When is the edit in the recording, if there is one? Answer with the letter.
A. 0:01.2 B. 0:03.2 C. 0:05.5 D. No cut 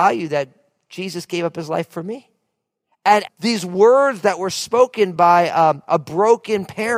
B